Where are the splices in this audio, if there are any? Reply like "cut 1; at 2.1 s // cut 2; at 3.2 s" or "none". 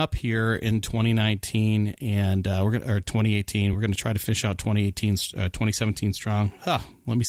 none